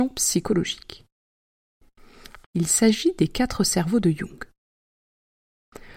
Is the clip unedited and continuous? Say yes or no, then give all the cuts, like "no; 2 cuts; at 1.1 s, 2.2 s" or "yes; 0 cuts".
no; 1 cut; at 2.4 s